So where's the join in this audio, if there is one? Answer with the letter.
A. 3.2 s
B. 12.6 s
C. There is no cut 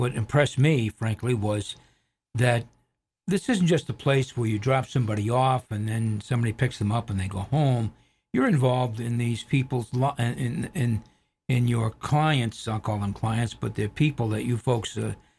A